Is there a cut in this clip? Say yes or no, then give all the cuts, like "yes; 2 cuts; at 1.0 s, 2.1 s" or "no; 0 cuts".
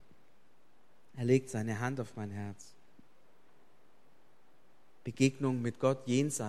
no; 0 cuts